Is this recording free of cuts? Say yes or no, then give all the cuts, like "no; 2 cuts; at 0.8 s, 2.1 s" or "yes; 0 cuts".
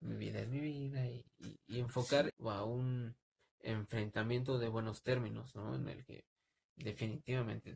no; 1 cut; at 2.3 s